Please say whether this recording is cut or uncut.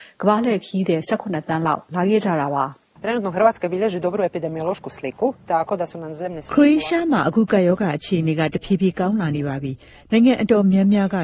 uncut